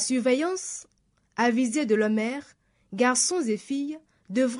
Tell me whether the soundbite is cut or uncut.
uncut